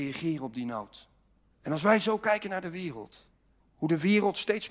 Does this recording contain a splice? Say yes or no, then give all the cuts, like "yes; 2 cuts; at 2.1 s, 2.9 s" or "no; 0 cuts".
yes; 2 cuts; at 1.5 s, 3.6 s